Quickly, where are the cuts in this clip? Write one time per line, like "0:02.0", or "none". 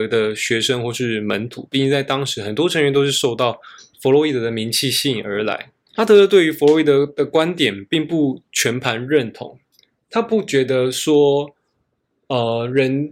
0:05.9